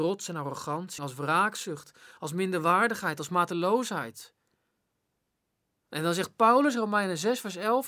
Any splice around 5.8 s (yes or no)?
no